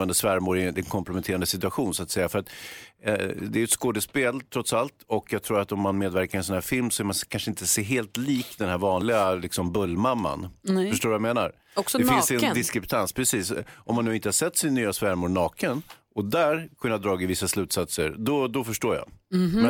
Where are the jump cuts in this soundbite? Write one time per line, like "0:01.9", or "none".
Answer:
none

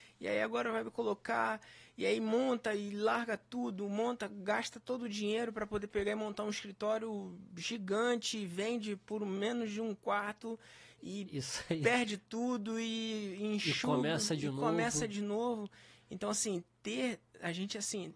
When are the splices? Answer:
none

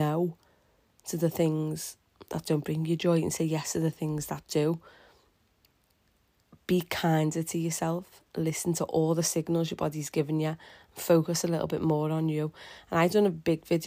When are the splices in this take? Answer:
none

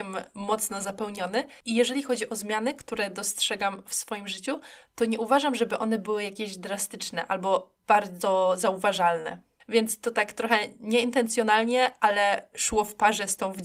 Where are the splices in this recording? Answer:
0:01.6
0:09.6

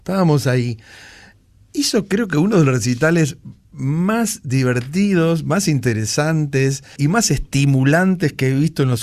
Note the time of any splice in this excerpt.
0:07.0

